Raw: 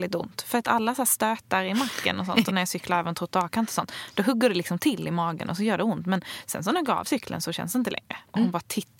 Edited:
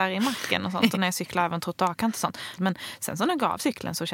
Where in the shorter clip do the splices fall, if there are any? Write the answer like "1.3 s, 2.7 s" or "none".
2.6 s